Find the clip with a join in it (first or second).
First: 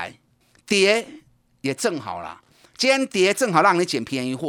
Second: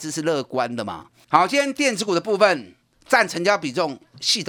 second